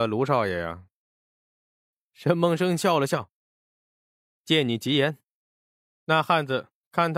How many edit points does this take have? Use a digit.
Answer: 1